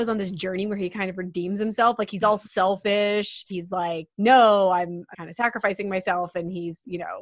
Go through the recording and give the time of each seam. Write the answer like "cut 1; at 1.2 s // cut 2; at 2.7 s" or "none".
cut 1; at 3.5 s // cut 2; at 5.1 s